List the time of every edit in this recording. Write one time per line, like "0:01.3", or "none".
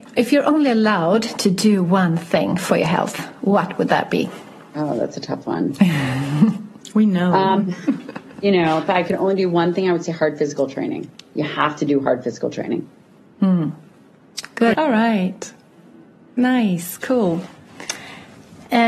0:14.7